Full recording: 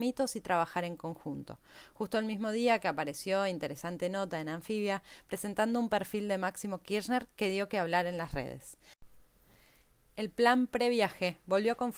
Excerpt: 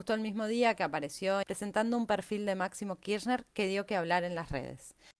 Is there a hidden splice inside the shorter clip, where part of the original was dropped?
yes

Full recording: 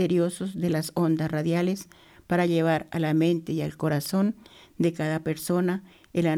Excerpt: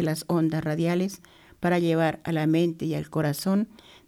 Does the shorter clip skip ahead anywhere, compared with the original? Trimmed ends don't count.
no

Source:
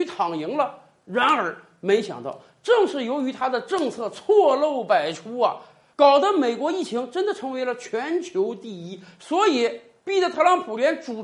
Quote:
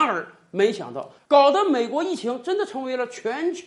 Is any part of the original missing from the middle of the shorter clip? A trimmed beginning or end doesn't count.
yes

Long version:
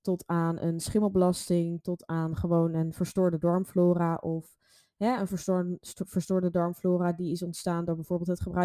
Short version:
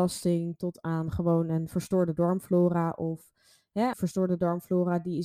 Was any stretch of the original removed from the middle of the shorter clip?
yes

